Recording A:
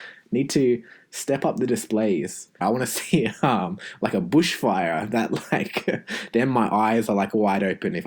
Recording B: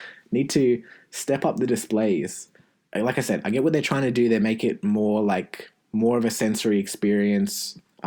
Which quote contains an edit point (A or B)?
A